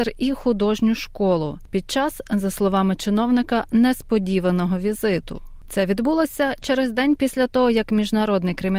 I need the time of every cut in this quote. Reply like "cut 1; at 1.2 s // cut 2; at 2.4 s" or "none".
none